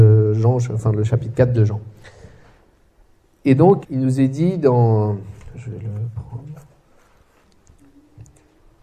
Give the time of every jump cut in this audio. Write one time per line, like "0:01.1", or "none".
0:03.8
0:05.5